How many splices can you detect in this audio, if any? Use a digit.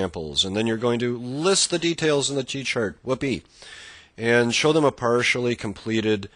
0